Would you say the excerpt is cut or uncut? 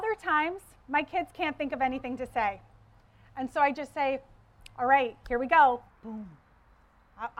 cut